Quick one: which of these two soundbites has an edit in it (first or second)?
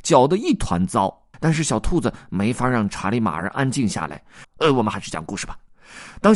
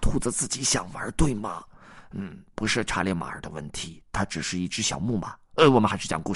first